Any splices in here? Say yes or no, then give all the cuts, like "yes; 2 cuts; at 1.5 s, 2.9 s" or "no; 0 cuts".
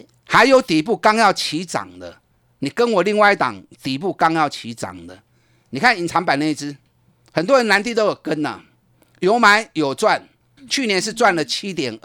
yes; 1 cut; at 10.6 s